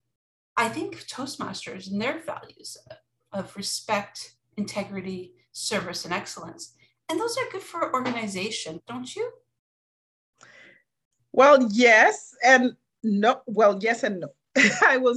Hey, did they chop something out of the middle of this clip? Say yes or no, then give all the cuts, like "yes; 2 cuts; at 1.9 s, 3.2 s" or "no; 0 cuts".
yes; 1 cut; at 8.8 s